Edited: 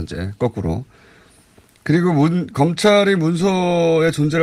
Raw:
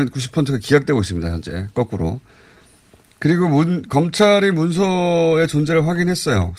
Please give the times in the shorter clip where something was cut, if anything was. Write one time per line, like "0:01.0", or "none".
none